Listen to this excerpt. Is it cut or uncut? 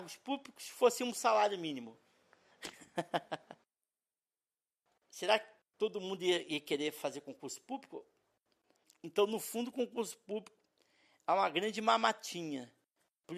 cut